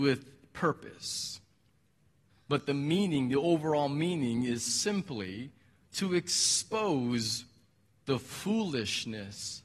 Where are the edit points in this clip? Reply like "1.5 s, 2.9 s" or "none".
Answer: 2.3 s

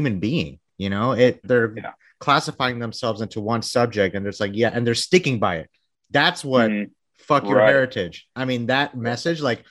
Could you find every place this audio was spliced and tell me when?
1.4 s, 7.0 s

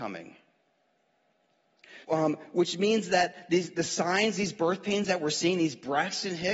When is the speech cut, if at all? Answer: 2.0 s

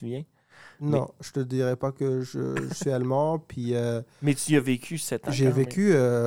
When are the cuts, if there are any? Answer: none

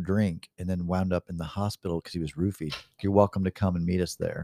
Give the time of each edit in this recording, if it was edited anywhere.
3.0 s

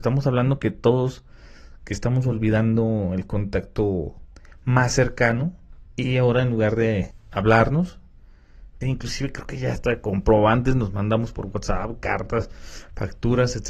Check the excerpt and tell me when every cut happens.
8.8 s

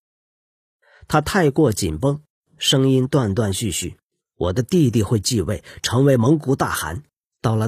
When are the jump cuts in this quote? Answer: 4.2 s

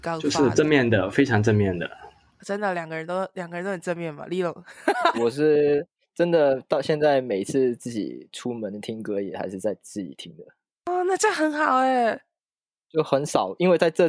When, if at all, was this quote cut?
5.1 s

